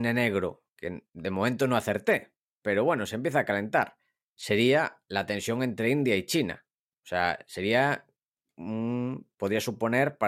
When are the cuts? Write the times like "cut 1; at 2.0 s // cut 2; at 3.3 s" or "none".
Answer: none